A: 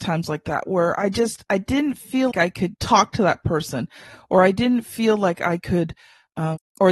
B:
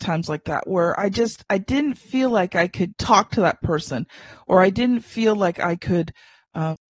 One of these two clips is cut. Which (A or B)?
A